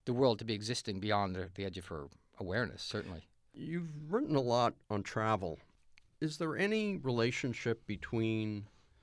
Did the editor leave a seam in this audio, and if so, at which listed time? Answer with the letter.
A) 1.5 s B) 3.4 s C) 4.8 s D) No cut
C